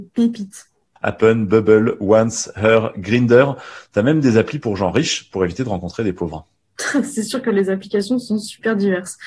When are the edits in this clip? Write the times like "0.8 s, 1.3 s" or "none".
1.0 s